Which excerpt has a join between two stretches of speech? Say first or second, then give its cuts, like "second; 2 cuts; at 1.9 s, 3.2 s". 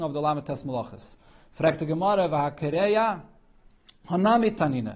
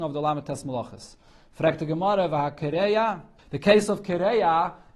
second; 1 cut; at 3.4 s